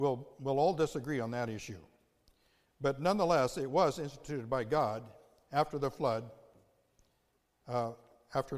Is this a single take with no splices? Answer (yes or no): yes